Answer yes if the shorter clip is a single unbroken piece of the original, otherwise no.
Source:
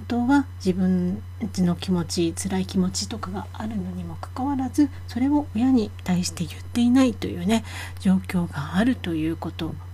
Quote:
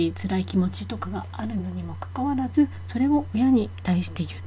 yes